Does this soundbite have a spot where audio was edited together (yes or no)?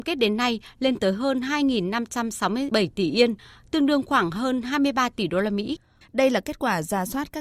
yes